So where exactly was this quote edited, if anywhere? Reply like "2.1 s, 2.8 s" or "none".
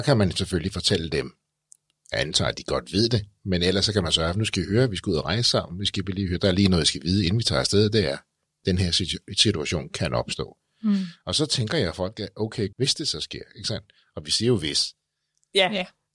12.7 s